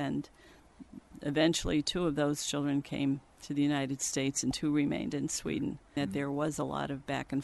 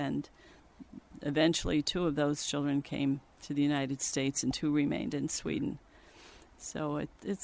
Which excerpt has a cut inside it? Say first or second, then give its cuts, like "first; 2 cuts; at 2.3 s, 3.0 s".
first; 1 cut; at 6.0 s